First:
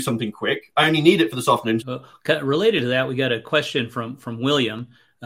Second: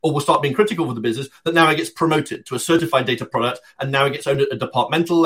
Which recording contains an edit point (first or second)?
first